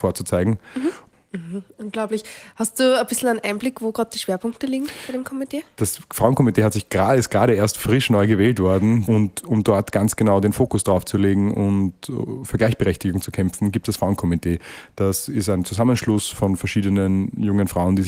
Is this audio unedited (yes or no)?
no